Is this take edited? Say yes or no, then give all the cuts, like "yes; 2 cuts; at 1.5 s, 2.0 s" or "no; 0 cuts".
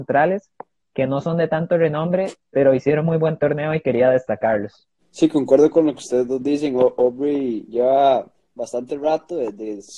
no; 0 cuts